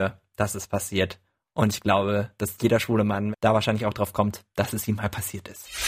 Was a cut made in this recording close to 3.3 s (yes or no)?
yes